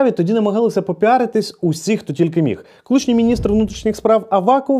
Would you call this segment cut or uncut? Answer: uncut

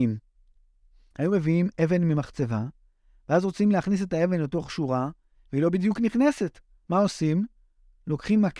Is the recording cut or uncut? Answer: uncut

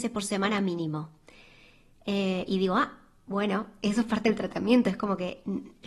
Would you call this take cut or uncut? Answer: uncut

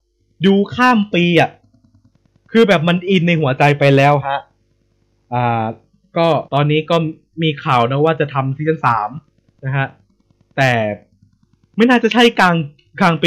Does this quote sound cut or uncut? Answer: cut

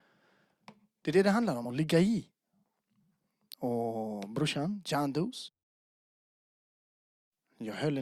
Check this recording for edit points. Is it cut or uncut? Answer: uncut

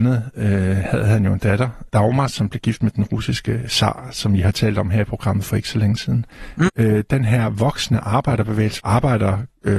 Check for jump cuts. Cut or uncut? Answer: cut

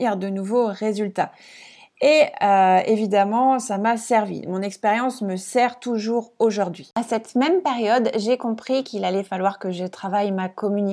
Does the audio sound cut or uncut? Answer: uncut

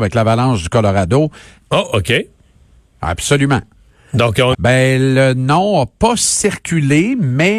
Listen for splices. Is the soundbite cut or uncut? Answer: cut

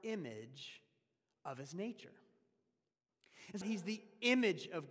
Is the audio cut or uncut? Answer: cut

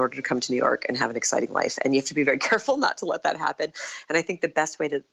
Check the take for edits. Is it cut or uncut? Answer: uncut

